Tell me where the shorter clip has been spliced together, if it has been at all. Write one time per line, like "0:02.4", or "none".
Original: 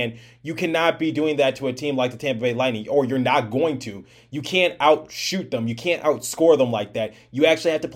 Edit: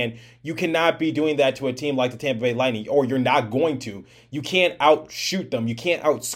none

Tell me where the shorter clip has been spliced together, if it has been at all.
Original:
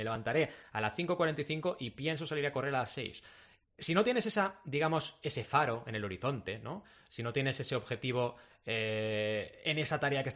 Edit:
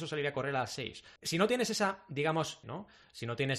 0:01.2
0:02.6

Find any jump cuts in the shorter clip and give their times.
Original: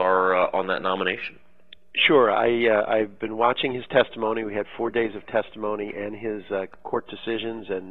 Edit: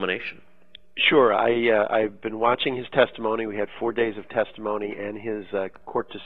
none

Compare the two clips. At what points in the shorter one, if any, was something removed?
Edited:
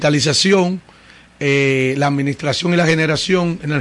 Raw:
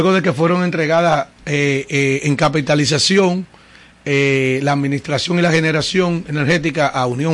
none

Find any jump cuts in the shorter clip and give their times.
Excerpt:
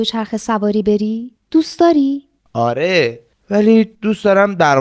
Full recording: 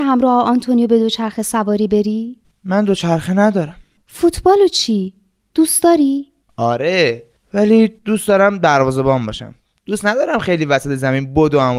0:01.4

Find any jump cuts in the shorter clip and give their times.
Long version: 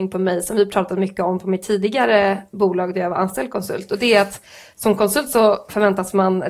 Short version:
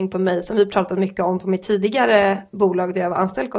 none

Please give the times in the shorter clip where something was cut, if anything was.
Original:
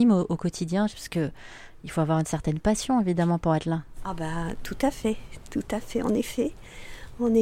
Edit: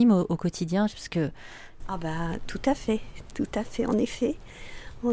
0:01.8

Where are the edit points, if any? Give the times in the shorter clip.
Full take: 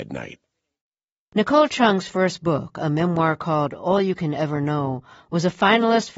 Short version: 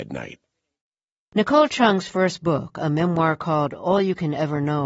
none

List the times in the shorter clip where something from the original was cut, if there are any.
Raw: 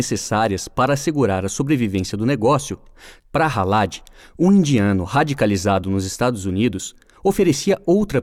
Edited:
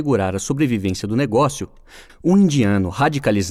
0:02.1

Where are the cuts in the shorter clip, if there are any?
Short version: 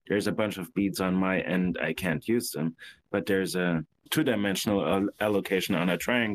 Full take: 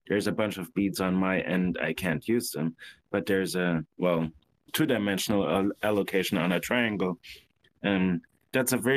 0:03.9

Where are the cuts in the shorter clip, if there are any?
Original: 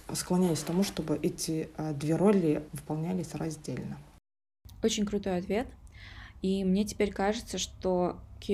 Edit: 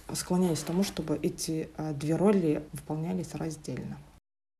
none

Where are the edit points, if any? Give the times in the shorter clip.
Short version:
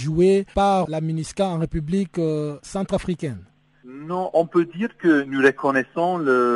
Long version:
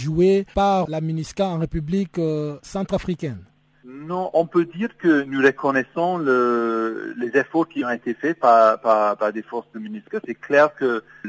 none

